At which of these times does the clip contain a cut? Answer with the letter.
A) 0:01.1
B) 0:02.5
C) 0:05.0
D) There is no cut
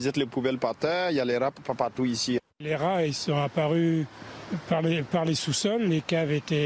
B